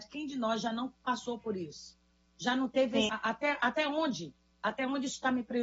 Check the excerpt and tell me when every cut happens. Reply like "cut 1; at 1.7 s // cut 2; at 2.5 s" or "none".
cut 1; at 3.1 s